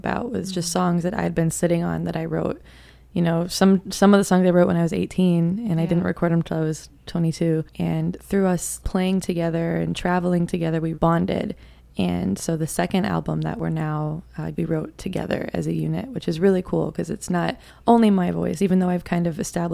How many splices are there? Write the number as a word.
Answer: two